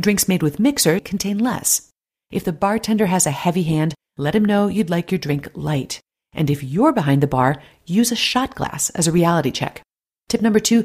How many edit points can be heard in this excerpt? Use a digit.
1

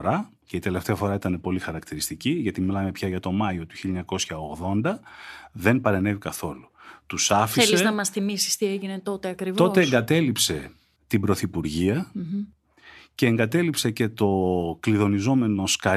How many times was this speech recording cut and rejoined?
0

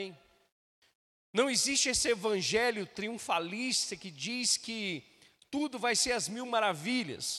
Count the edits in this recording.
0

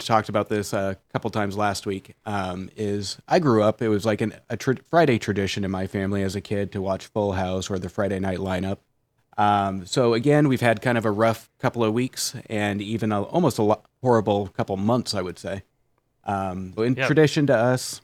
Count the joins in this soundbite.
2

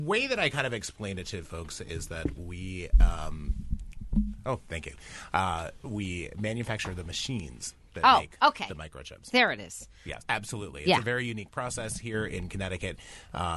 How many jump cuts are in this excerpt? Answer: 1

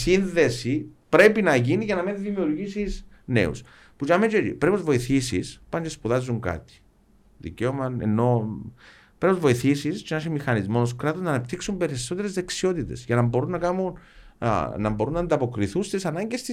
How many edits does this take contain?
0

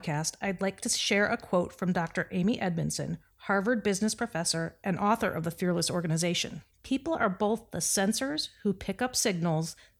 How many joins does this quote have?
1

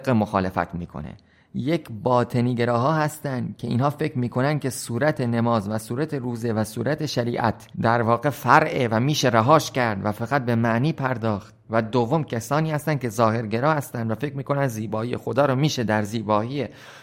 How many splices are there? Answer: 1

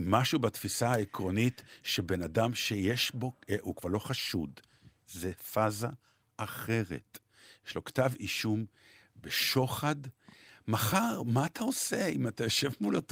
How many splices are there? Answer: 1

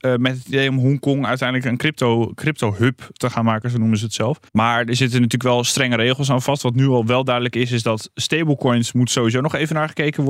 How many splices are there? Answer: 1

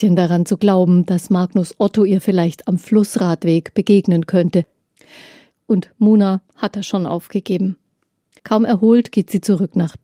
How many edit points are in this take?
2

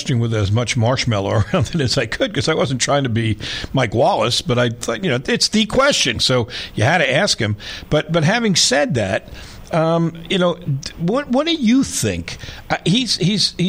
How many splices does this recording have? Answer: 1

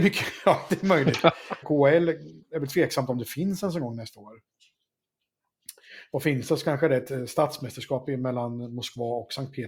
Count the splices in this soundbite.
1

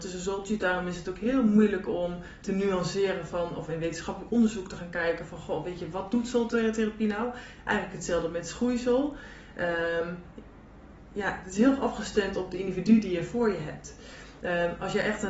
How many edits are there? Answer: 0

